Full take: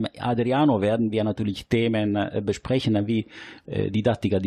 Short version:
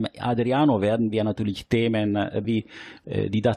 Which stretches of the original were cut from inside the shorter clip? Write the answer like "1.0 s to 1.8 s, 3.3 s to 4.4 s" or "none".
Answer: 2.4 s to 3.1 s